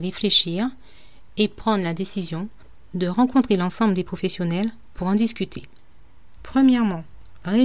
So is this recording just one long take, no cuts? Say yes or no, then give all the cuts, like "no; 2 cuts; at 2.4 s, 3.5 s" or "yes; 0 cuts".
no; 1 cut; at 6.4 s